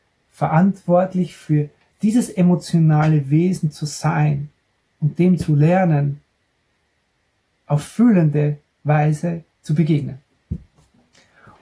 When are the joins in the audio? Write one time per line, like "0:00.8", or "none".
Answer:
0:09.5